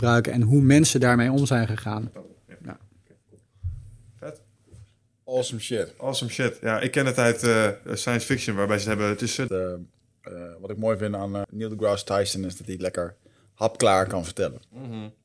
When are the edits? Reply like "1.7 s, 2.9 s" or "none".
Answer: 2.1 s, 9.5 s, 11.4 s